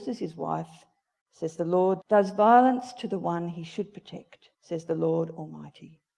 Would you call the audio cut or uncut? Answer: cut